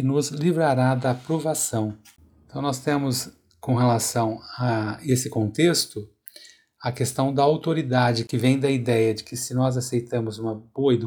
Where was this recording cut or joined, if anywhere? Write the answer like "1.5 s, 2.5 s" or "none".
none